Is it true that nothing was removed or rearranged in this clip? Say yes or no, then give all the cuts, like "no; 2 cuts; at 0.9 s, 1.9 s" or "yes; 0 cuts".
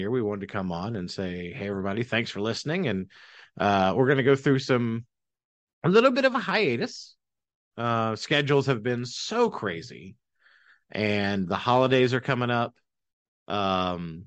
yes; 0 cuts